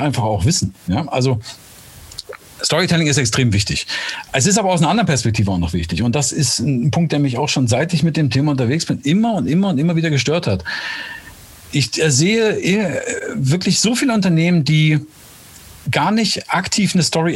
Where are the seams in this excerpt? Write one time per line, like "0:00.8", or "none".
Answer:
none